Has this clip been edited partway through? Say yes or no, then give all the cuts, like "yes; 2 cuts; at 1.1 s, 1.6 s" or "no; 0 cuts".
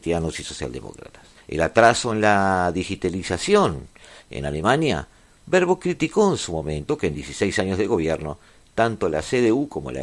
yes; 1 cut; at 1.4 s